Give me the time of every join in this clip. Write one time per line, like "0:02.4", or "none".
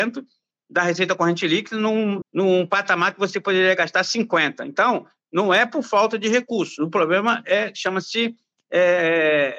0:02.2